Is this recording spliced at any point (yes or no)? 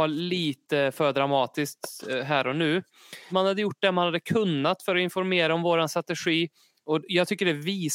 yes